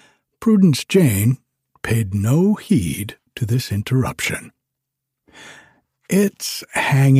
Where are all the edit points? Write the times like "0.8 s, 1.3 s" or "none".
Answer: none

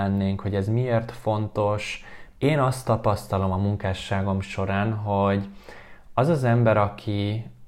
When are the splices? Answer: 2.3 s

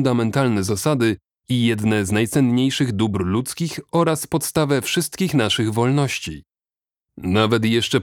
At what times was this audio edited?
none

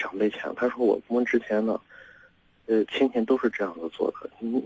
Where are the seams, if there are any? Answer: none

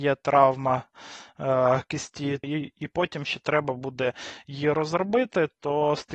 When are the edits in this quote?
2.4 s

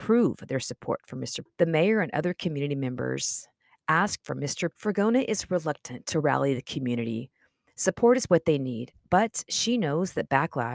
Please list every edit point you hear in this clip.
1.5 s, 4.7 s

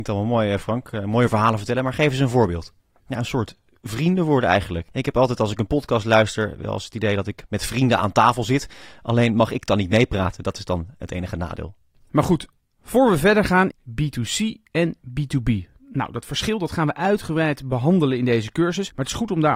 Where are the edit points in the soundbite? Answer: 3.0 s, 13.7 s

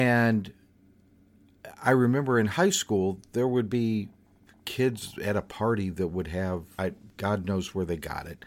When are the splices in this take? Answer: 6.8 s

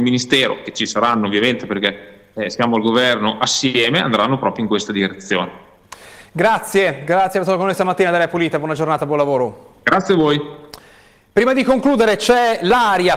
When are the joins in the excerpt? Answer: none

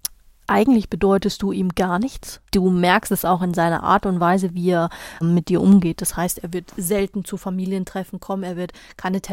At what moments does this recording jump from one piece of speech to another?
2.4 s, 5.2 s

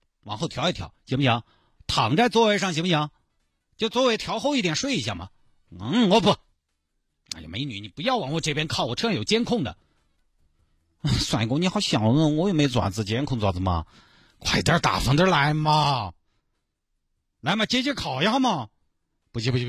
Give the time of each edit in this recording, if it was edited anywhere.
none

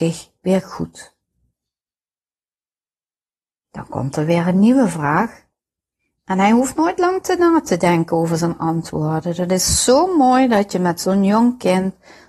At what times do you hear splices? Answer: none

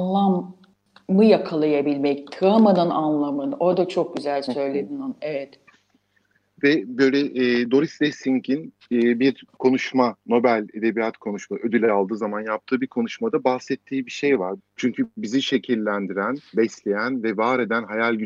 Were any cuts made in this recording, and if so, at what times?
14.6 s, 16.5 s

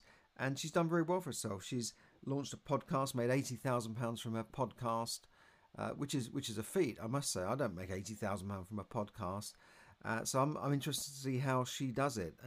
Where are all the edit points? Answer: none

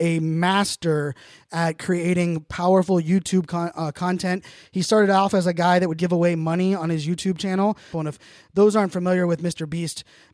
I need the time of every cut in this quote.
6.0 s, 7.9 s

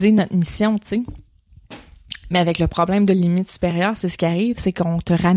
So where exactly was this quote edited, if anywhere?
none

